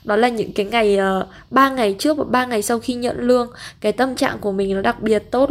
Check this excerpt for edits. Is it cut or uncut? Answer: uncut